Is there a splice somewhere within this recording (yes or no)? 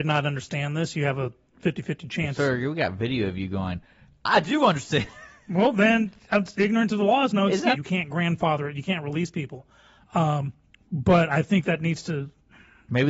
yes